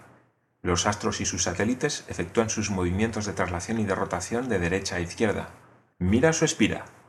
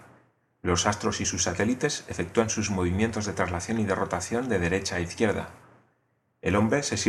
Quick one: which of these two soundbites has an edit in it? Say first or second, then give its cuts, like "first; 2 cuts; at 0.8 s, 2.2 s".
first; 1 cut; at 5.9 s